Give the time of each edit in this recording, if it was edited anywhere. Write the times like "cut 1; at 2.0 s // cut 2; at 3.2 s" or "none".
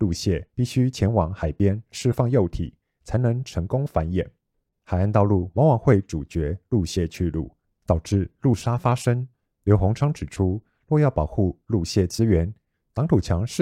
none

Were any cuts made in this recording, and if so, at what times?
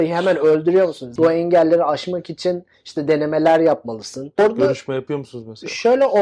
cut 1; at 1.2 s // cut 2; at 4.4 s

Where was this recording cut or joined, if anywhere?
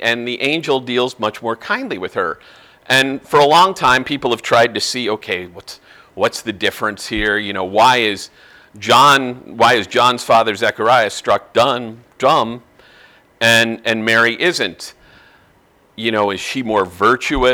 none

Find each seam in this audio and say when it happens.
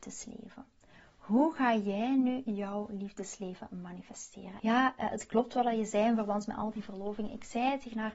cut 1; at 4.6 s

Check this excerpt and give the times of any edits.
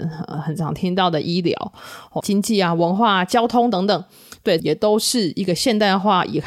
cut 1; at 2.2 s // cut 2; at 4.6 s

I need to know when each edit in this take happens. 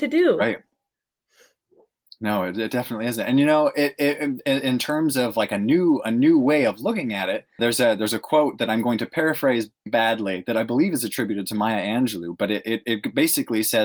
cut 1; at 7.6 s // cut 2; at 9.9 s

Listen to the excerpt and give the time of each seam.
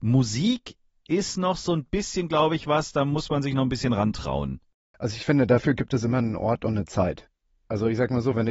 none

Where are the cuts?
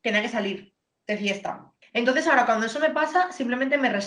cut 1; at 1.8 s

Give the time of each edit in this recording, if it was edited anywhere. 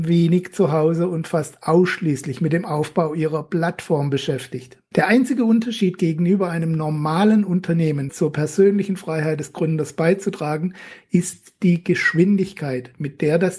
cut 1; at 4.9 s // cut 2; at 8.1 s

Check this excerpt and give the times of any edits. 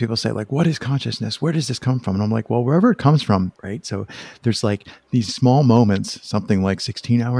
cut 1; at 3.5 s // cut 2; at 5.3 s

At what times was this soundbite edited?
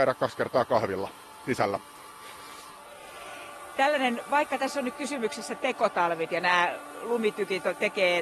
cut 1; at 6.3 s

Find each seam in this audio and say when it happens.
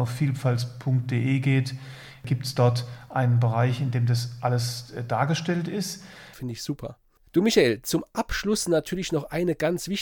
cut 1; at 6.3 s

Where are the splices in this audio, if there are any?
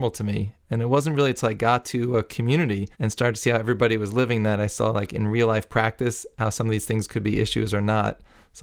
cut 1; at 2.9 s

